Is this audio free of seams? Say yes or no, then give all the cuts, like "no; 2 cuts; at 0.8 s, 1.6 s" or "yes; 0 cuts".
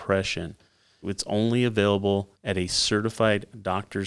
no; 2 cuts; at 1.0 s, 2.3 s